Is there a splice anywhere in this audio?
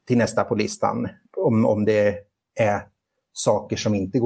no; 0 cuts

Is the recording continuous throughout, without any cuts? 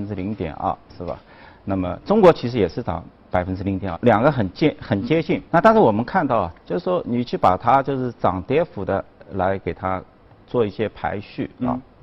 no; 2 cuts; at 3.9 s, 5.4 s

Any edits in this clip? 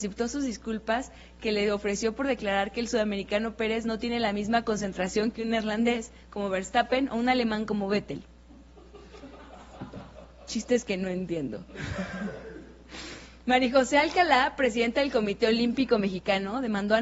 no; 0 cuts

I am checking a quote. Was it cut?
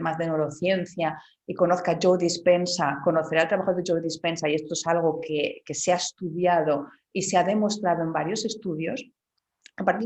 no; 0 cuts

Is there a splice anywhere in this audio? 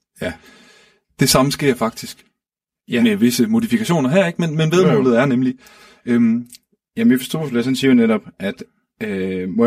no; 0 cuts

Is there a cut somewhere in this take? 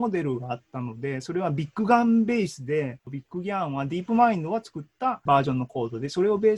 yes; 1 cut; at 3.0 s

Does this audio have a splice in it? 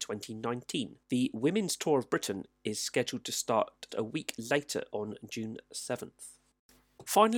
yes; 2 cuts; at 1.0 s, 3.9 s

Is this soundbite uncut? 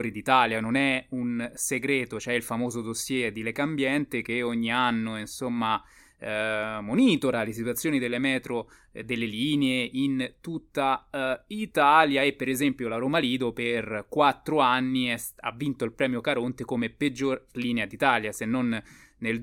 yes; 0 cuts

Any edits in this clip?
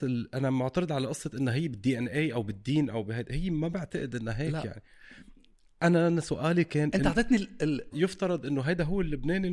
yes; 1 cut; at 7.9 s

